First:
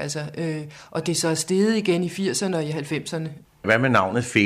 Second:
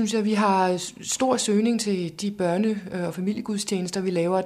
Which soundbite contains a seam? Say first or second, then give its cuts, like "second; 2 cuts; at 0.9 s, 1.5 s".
first; 1 cut; at 3.4 s